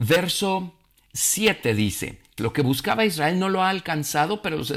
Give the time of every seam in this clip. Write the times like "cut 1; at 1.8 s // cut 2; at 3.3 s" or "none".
cut 1; at 2.4 s